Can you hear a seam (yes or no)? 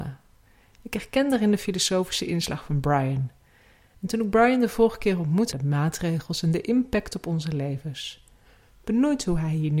yes